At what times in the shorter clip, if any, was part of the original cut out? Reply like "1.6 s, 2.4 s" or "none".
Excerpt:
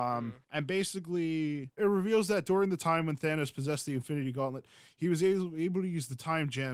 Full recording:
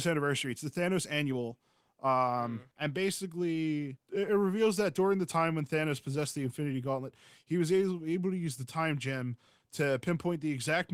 1.8 s